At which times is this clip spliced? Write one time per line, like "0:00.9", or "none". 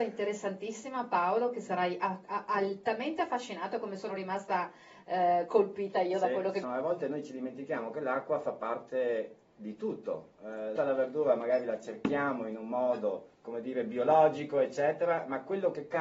0:06.6
0:10.8
0:13.3